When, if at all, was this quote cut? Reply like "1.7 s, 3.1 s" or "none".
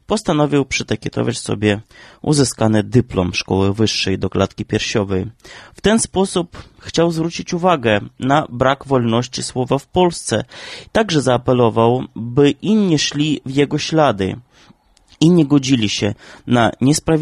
none